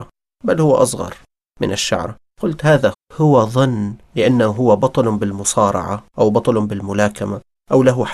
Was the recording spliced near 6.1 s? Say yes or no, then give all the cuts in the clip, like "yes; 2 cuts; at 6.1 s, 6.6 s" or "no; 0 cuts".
yes; 2 cuts; at 2.9 s, 6.1 s